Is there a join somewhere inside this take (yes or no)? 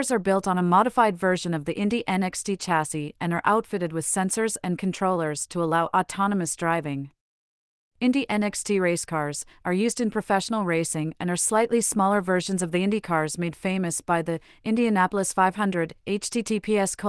no